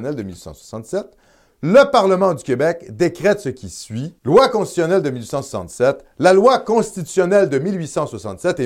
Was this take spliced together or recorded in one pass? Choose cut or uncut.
cut